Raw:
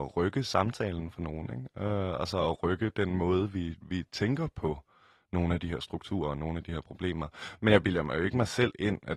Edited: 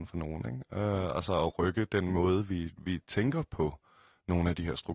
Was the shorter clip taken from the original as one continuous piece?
yes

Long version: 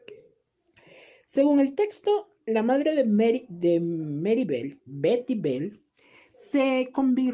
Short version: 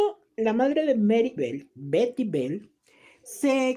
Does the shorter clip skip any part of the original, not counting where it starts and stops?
yes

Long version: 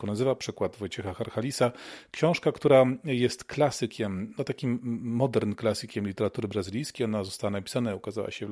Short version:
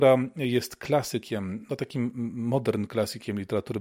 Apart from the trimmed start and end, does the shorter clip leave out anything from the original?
no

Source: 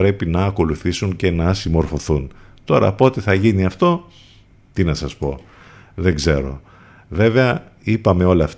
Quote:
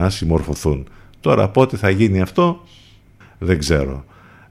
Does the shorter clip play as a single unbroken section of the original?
no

